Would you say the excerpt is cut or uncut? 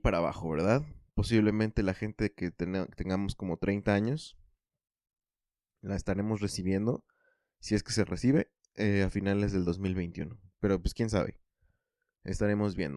uncut